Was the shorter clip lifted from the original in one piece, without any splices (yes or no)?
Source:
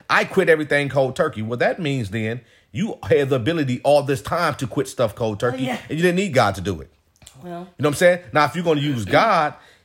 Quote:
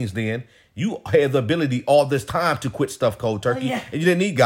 yes